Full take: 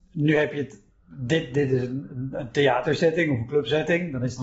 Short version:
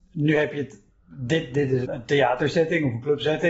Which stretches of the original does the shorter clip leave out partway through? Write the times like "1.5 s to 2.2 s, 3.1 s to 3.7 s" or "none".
1.8 s to 2.3 s